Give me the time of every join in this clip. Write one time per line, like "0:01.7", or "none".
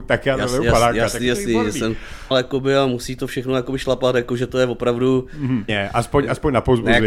0:02.3
0:05.7